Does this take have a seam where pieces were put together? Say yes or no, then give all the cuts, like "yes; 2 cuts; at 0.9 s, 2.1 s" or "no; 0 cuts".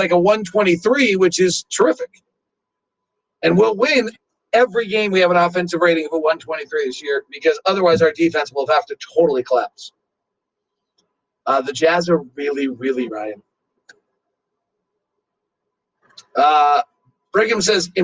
yes; 1 cut; at 13.1 s